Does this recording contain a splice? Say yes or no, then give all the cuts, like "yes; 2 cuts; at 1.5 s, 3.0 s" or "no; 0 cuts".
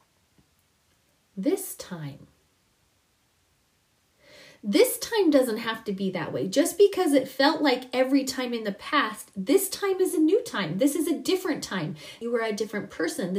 yes; 1 cut; at 12.2 s